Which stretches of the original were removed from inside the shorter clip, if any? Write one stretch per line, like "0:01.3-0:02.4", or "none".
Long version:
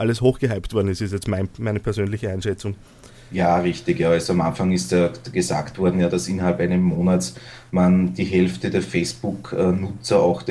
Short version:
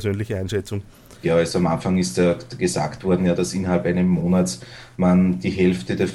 0:03.2-0:04.0